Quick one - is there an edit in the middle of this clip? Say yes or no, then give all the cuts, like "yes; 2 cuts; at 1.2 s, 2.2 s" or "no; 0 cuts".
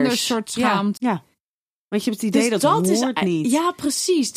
yes; 1 cut; at 1.0 s